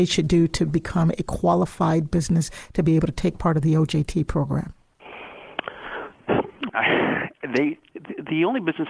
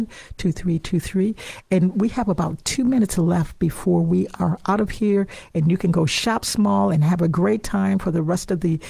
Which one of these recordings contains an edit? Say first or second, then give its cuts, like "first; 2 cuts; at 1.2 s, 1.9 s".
first; 2 cuts; at 6.7 s, 7.9 s